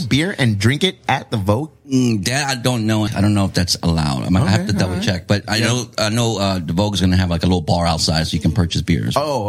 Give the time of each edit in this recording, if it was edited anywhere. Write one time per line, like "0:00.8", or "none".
0:03.1